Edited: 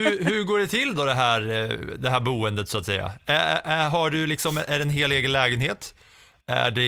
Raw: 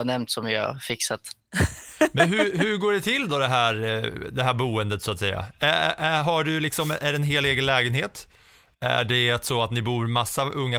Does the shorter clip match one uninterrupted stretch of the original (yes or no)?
yes